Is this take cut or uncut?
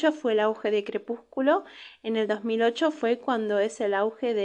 uncut